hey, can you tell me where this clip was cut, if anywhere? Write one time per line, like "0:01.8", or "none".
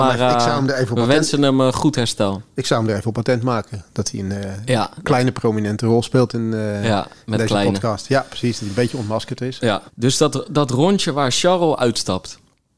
0:09.9